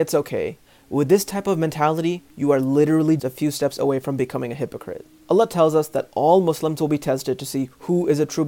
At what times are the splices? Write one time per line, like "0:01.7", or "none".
0:03.2